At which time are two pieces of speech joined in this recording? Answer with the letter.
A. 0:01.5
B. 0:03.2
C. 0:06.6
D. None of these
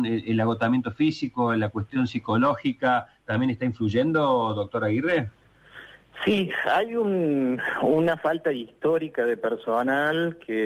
D